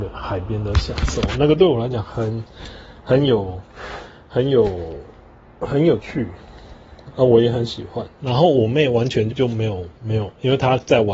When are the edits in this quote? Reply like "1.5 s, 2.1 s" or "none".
8.2 s, 9.3 s